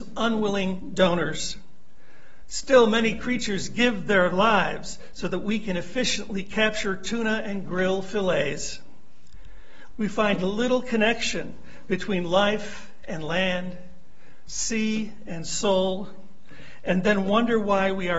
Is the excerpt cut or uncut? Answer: cut